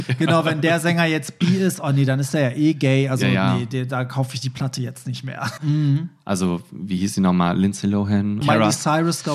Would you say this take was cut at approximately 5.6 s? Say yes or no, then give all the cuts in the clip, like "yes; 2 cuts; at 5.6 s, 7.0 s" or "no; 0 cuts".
yes; 2 cuts; at 5.6 s, 8.4 s